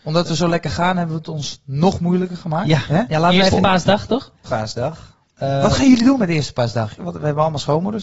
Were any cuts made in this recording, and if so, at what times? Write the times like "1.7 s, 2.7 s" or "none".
3.1 s, 4.4 s, 7.0 s